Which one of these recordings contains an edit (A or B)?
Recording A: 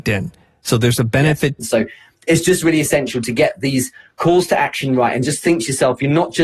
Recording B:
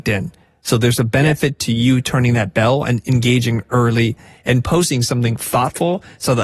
A